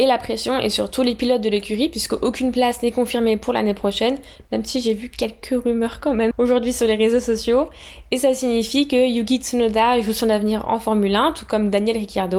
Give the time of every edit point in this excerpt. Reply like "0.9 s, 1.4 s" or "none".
6.3 s